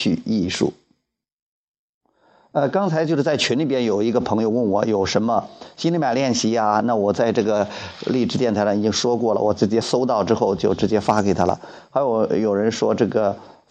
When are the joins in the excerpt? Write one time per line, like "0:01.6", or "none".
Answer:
0:09.8

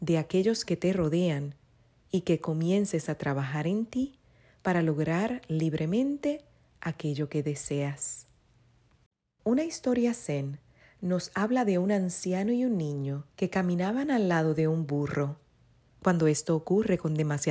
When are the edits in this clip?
0:09.4
0:13.3
0:15.9

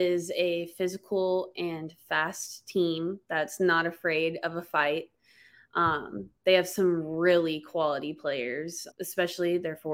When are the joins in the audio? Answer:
0:08.9

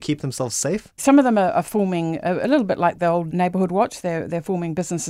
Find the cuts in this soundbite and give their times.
0:01.0

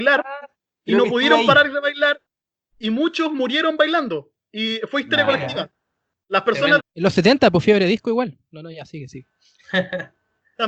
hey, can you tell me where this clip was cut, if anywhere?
0:06.8

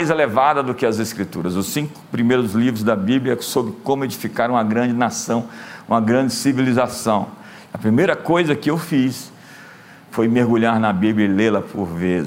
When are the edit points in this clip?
0:07.7

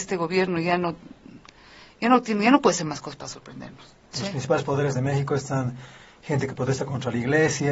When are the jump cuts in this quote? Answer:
0:04.1

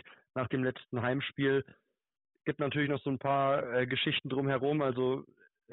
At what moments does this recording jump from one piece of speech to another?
none

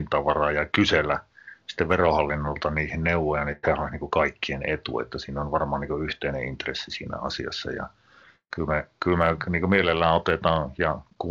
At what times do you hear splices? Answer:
none

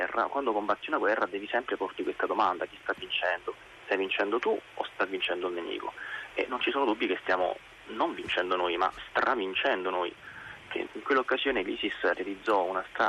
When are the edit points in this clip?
0:10.9

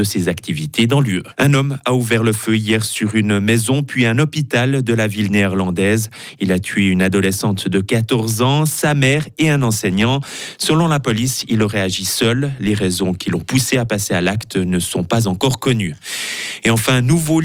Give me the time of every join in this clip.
0:01.3

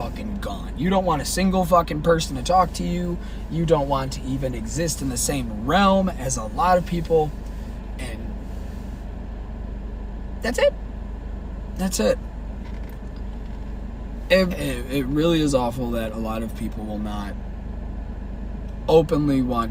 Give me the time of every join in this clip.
0:14.5

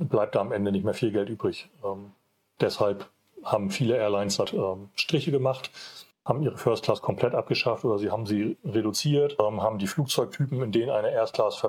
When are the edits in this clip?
0:04.5

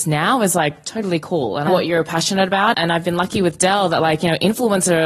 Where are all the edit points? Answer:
0:01.7
0:02.7

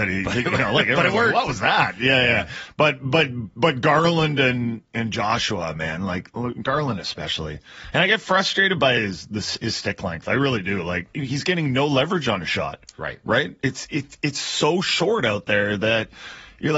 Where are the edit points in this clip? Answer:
0:11.1

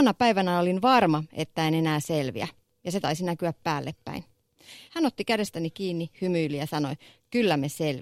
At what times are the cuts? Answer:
0:04.9

